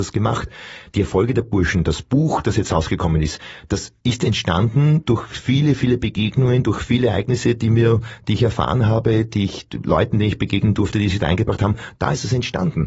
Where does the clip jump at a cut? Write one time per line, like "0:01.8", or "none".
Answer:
0:04.0